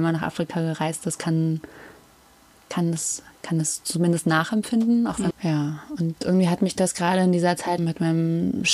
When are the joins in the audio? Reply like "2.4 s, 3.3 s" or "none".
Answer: 5.3 s, 7.8 s